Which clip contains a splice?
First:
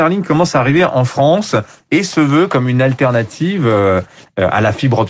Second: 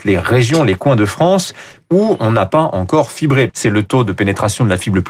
second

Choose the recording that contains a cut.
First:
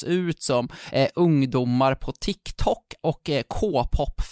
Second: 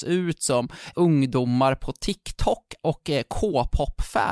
second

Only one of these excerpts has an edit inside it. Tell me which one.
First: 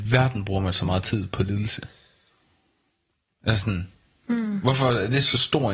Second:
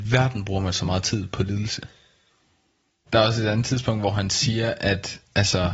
second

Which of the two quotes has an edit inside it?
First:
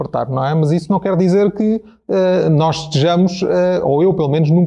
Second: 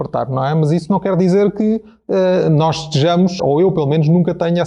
second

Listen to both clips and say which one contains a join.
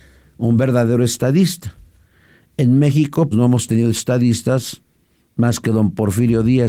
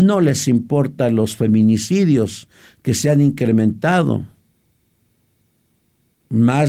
first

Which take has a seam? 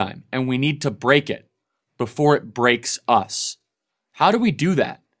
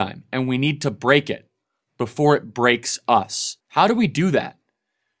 second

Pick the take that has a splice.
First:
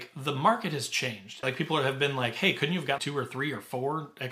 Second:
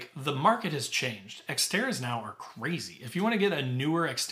first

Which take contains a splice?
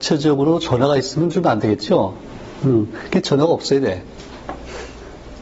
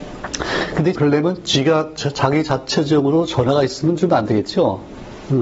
second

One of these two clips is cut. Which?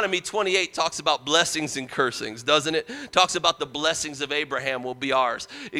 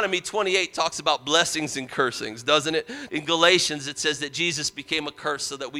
second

